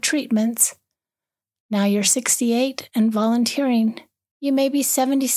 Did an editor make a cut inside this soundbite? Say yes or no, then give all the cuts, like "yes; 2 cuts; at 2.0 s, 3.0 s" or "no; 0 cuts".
no; 0 cuts